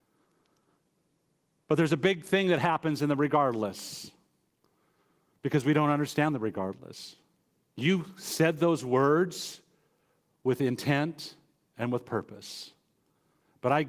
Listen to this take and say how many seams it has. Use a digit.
1